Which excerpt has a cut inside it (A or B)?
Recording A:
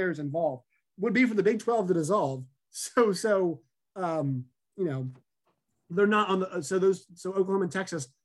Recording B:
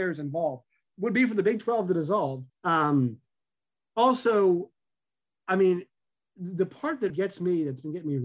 B